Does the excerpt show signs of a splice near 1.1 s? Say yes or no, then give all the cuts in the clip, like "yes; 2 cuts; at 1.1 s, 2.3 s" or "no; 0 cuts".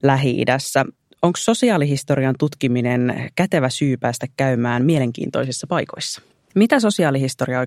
no; 1 cut; at 6.5 s